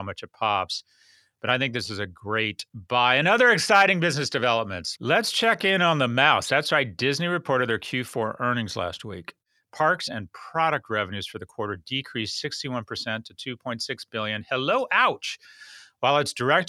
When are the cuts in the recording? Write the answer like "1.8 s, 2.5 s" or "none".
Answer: 10.1 s